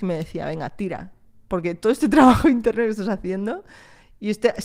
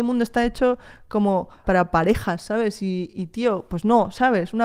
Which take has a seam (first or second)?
second